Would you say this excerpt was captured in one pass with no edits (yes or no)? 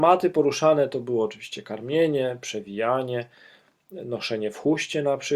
yes